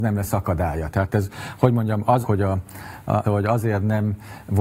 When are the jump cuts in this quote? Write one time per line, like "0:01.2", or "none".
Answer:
0:00.9
0:02.2
0:03.2

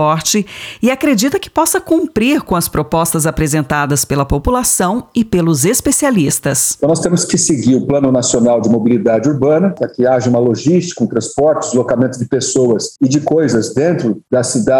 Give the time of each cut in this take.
none

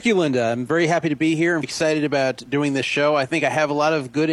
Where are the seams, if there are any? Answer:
0:01.6

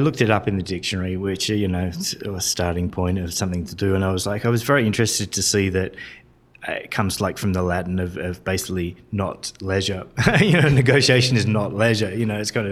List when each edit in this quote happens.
none

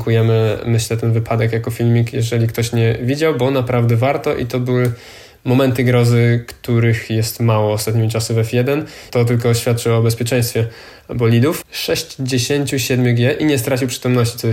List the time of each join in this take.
0:09.1
0:11.6

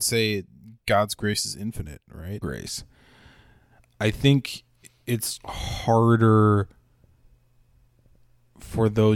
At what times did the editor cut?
0:02.4
0:05.4

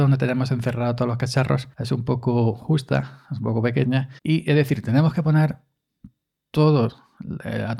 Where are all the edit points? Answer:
0:01.7
0:04.2

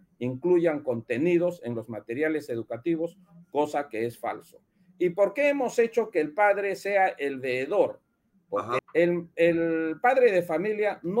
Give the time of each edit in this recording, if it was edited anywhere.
0:08.8

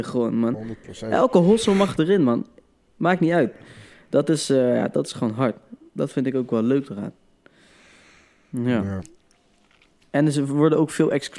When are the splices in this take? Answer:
none

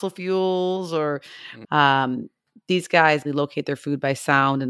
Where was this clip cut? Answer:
0:01.6
0:03.2

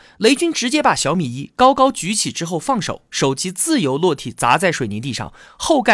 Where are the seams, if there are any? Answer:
none

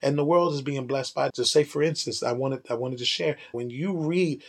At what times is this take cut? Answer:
0:01.3
0:03.5

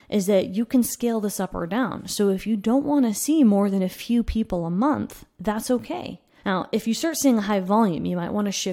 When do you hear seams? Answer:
0:06.4

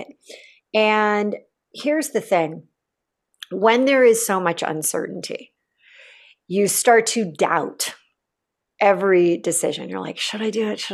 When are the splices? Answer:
none

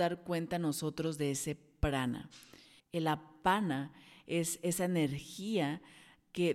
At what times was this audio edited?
0:02.8

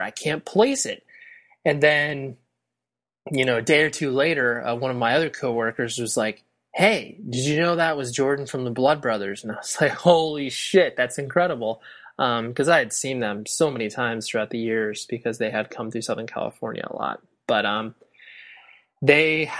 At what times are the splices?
none

